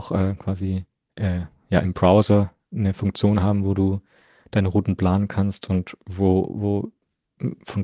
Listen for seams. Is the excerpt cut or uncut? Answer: uncut